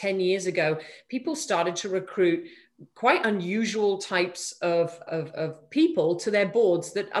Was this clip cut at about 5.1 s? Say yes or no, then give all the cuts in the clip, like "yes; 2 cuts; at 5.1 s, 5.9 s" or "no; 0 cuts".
yes; 1 cut; at 5.1 s